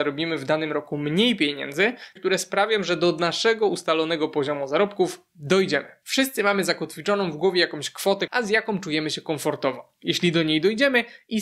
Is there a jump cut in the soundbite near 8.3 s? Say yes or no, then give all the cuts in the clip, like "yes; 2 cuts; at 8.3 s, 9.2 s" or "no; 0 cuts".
yes; 3 cuts; at 2.2 s, 6.0 s, 8.3 s